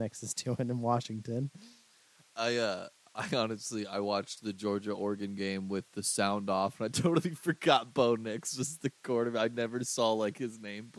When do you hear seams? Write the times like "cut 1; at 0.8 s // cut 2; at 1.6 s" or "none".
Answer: none